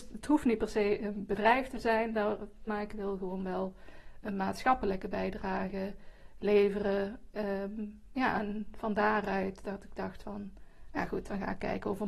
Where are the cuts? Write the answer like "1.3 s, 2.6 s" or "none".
2.7 s